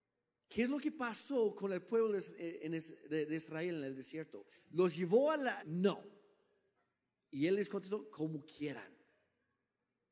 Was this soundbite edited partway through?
yes; 2 cuts; at 4.5 s, 5.6 s

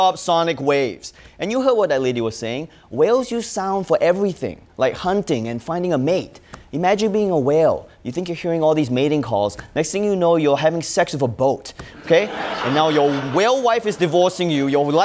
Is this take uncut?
yes; 0 cuts

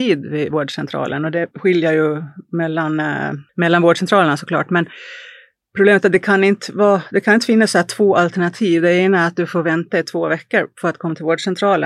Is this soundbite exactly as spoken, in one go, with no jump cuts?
yes; 0 cuts

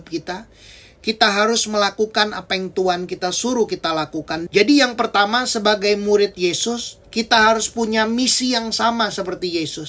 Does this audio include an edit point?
yes; 2 cuts; at 4.5 s, 7.0 s

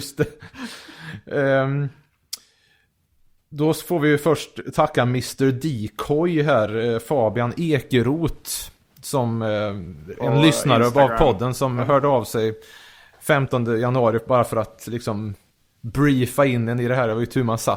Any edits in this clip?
no; 0 cuts

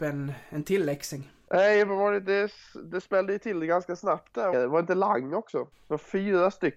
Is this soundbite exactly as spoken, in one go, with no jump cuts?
no; 2 cuts; at 4.5 s, 5.7 s

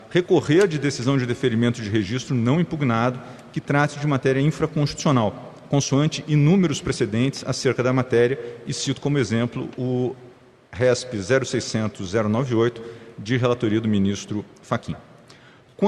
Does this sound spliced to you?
no; 0 cuts

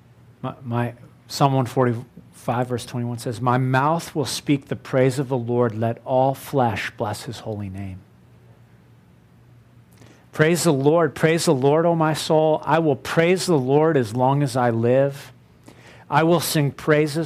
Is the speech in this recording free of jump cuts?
yes; 0 cuts

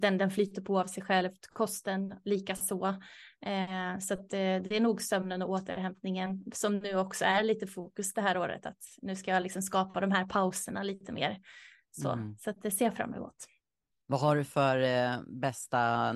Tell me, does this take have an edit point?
no; 0 cuts

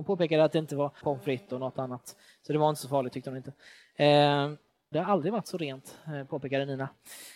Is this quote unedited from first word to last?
no; 2 cuts; at 1.0 s, 4.9 s

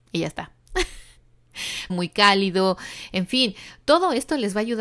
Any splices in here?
yes; 1 cut; at 1.9 s

